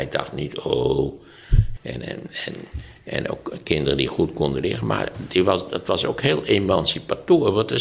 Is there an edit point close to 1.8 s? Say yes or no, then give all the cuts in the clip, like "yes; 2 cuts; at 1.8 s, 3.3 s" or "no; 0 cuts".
yes; 1 cut; at 1.8 s